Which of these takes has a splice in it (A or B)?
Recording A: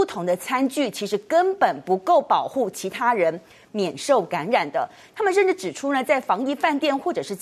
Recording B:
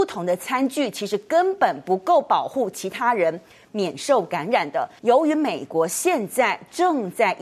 B